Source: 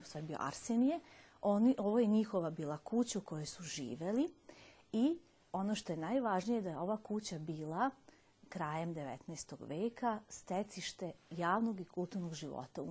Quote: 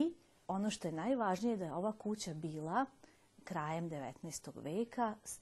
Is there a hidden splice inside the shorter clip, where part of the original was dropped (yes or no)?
no